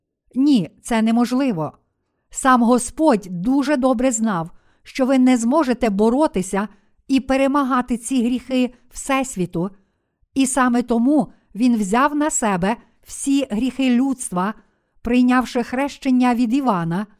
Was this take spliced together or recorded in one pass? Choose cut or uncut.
uncut